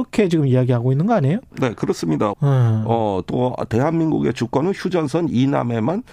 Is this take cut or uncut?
cut